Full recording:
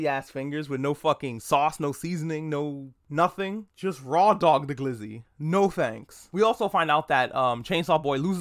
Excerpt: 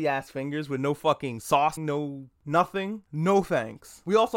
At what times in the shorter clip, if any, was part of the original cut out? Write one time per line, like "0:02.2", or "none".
0:01.8
0:03.1